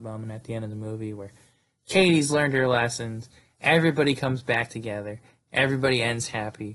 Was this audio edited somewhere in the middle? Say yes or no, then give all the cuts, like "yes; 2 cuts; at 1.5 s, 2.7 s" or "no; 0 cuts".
no; 0 cuts